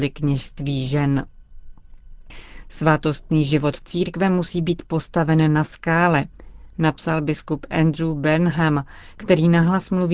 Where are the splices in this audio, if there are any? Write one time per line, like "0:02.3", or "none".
0:02.6